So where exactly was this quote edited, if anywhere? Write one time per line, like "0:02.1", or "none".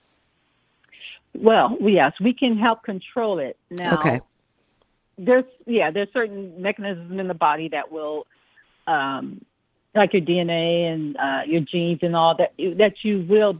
none